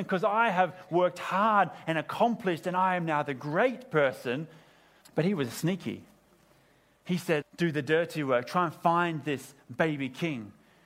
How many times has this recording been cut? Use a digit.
2